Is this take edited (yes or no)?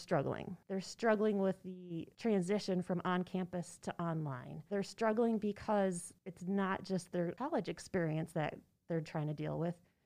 no